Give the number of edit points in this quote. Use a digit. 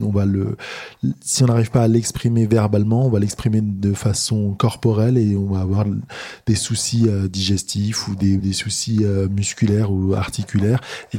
1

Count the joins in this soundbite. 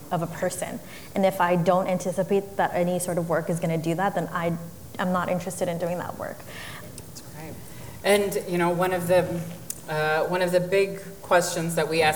1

